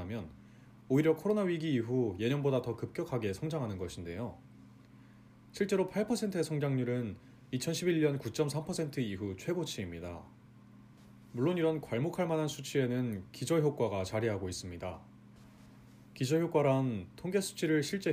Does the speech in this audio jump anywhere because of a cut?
no; 0 cuts

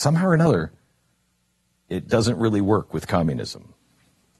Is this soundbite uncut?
yes; 0 cuts

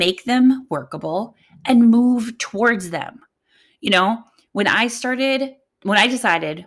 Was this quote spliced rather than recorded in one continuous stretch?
no; 0 cuts

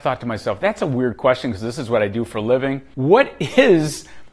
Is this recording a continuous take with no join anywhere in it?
no; 1 cut; at 2.9 s

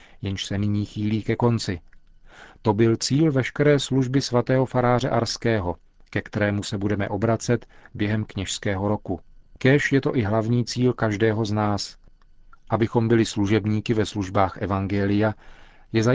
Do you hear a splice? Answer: no; 0 cuts

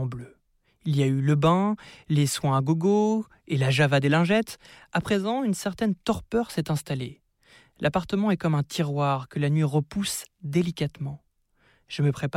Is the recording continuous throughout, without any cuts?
yes; 0 cuts

